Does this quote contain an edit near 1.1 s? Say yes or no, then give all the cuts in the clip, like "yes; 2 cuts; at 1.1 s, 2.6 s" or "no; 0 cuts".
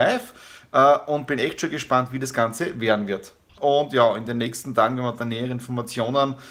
no; 1 cut; at 3.6 s